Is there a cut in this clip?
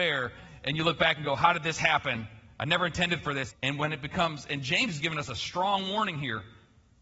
yes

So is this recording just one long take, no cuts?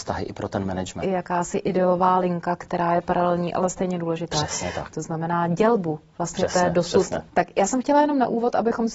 no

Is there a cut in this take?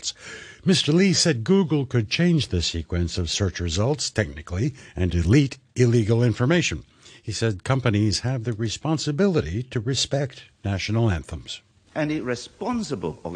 yes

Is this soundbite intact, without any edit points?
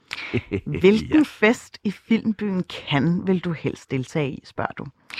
yes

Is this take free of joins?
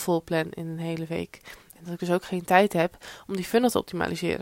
no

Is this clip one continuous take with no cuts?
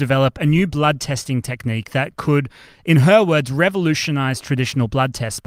yes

